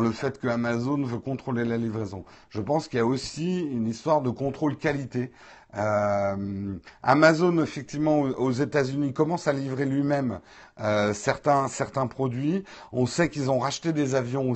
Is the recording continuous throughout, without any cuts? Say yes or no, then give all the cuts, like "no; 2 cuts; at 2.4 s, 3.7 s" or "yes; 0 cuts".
yes; 0 cuts